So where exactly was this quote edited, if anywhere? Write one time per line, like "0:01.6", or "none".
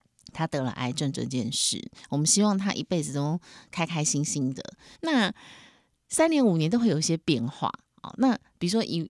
0:04.9